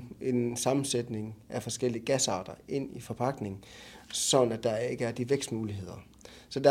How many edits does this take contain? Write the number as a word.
zero